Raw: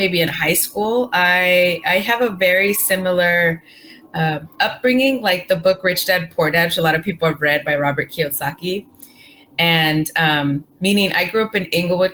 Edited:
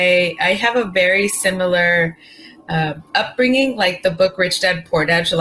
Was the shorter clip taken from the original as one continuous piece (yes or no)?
yes